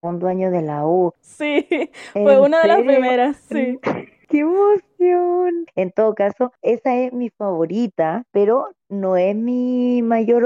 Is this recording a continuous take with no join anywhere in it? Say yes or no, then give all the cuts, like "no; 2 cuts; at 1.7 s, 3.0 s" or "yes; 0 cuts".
no; 2 cuts; at 1.2 s, 5.7 s